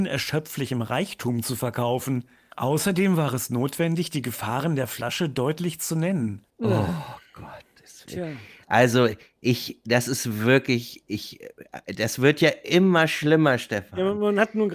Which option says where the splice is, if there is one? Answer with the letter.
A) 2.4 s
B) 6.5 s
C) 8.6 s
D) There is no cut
B